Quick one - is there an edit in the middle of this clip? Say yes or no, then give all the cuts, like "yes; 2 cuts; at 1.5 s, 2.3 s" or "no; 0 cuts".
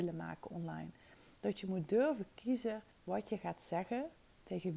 yes; 2 cuts; at 1.4 s, 2.9 s